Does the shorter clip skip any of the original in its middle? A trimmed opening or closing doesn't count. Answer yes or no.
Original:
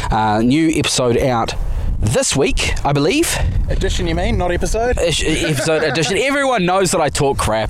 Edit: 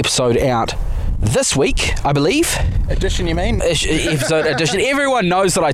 yes